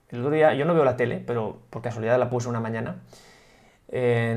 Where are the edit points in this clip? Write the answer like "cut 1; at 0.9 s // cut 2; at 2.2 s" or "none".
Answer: none